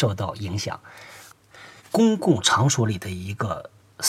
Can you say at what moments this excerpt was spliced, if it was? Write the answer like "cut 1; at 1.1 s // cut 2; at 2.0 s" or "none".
cut 1; at 1.8 s